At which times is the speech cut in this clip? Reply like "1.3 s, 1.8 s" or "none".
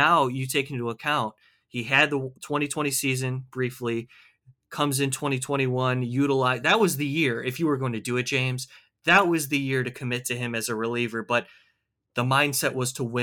none